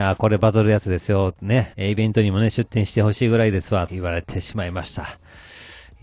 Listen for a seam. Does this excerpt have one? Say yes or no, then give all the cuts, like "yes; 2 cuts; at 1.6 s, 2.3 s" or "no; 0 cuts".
yes; 2 cuts; at 1.7 s, 3.9 s